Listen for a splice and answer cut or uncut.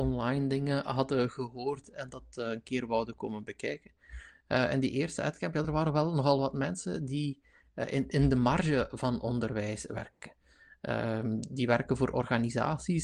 uncut